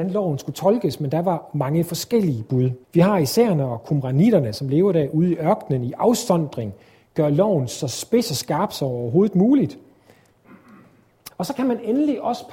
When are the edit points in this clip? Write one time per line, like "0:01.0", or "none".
0:02.8
0:11.3